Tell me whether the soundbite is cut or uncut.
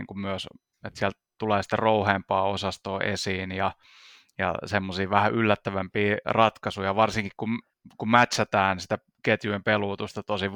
uncut